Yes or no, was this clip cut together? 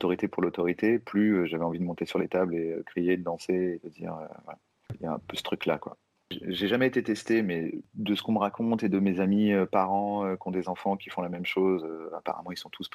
yes